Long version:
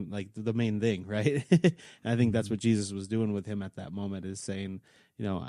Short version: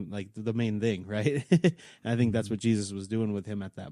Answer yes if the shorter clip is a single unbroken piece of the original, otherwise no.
yes